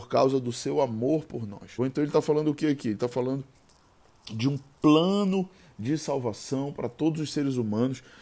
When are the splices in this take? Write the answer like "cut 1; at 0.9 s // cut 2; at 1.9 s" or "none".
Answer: cut 1; at 1.8 s